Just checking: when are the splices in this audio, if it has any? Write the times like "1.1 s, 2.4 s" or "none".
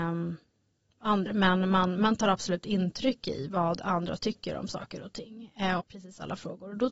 1.3 s, 5.8 s